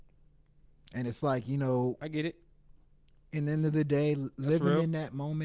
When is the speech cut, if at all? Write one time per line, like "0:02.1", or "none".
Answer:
none